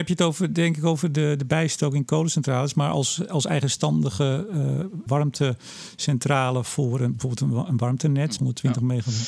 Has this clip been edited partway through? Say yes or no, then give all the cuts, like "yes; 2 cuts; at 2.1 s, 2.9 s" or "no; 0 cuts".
yes; 2 cuts; at 5.1 s, 8.4 s